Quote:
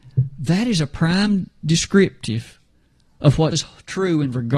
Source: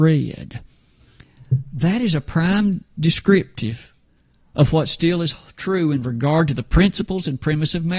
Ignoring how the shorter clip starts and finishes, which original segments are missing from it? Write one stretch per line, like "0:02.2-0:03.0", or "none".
0:04.9-0:05.2